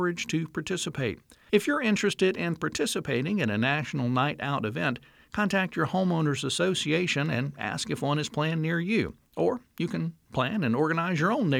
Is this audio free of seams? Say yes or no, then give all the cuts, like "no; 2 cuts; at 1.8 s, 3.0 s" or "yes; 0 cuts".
no; 1 cut; at 1.5 s